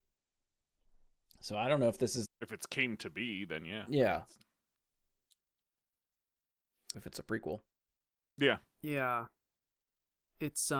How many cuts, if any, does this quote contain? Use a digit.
2